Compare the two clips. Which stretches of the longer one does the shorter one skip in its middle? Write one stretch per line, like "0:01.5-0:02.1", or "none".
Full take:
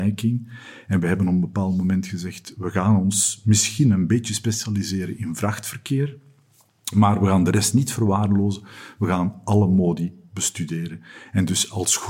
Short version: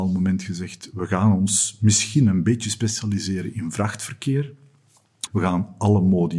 0:06.9-0:08.9